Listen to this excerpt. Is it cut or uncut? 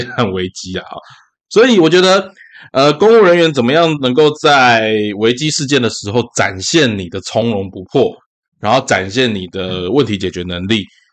uncut